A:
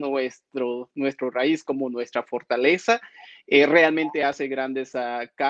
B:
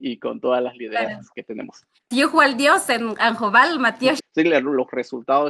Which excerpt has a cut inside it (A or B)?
B